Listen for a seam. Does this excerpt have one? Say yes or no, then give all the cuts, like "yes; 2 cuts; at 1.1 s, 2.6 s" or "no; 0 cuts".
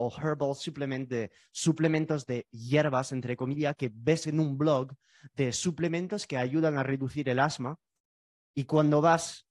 no; 0 cuts